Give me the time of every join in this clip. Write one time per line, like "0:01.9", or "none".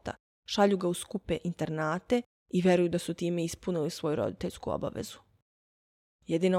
none